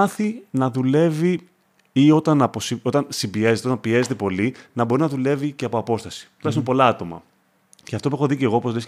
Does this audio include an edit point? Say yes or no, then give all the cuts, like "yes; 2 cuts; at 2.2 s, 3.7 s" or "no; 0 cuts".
no; 0 cuts